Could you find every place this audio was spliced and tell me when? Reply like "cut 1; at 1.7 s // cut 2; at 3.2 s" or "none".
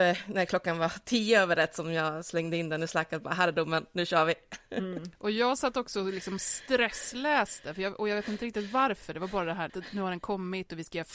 cut 1; at 9.7 s